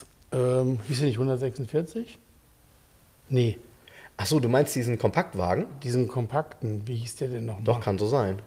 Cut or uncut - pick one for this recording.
uncut